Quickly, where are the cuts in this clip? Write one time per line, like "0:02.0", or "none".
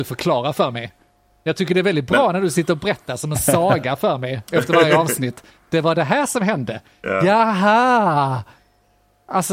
none